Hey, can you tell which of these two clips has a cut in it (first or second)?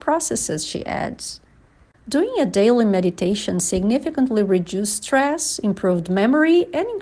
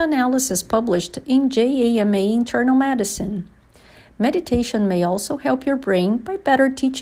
first